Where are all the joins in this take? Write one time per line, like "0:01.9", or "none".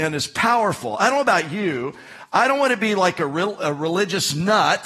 none